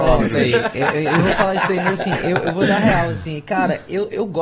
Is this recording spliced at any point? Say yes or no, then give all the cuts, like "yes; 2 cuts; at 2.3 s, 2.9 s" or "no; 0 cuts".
no; 0 cuts